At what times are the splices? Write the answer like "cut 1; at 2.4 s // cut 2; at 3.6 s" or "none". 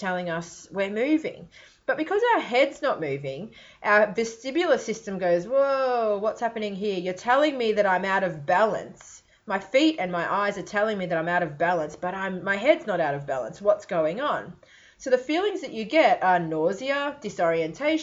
none